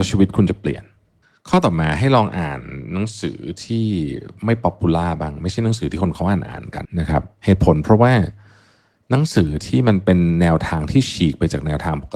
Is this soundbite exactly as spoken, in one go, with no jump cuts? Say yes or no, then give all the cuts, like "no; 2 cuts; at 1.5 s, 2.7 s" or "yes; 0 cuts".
no; 1 cut; at 6.9 s